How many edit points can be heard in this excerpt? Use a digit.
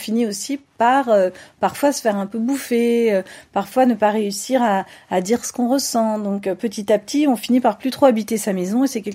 0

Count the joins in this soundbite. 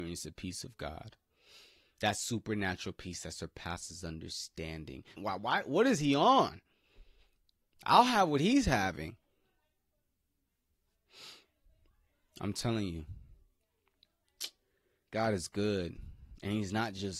1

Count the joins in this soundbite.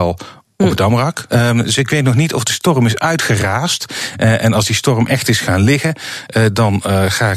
1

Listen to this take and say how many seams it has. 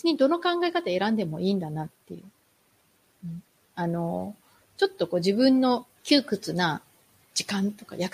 2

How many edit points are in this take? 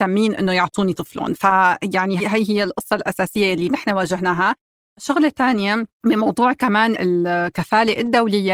1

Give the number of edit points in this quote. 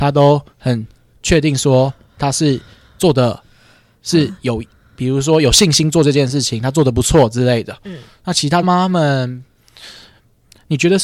1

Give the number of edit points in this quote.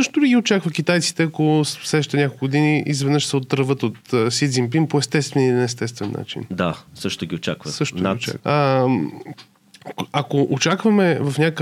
2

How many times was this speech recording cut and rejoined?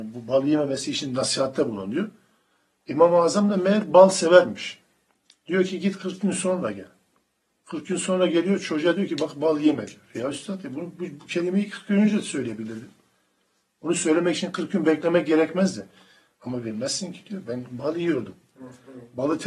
0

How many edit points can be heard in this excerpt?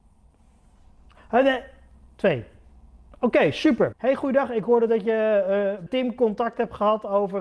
2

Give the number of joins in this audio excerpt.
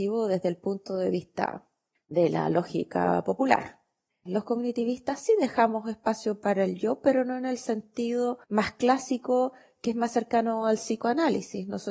2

